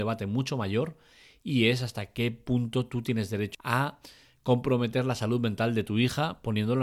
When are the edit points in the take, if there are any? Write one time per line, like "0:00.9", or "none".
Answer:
0:03.5